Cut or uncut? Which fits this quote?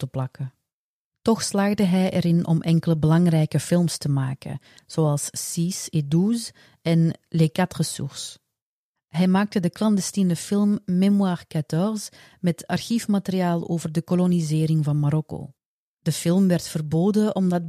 uncut